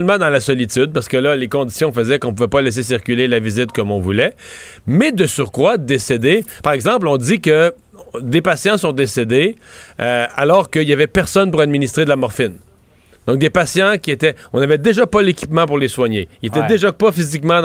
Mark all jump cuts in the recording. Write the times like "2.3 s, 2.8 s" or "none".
none